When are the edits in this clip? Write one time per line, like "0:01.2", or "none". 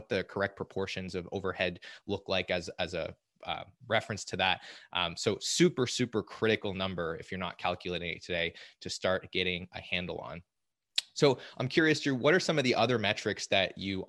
none